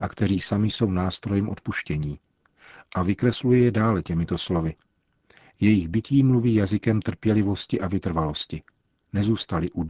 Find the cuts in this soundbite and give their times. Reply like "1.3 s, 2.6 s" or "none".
none